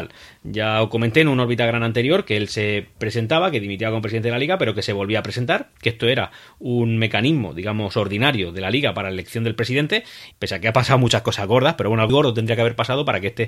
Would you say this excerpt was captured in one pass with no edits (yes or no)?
no